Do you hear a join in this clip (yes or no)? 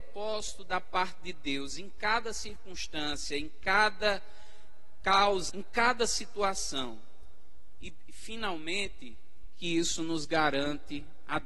yes